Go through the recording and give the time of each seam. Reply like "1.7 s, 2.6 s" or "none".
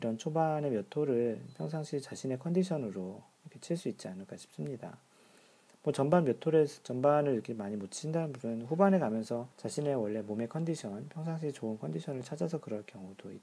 9.5 s